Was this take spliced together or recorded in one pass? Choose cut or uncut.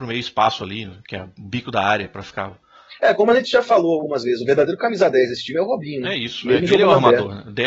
uncut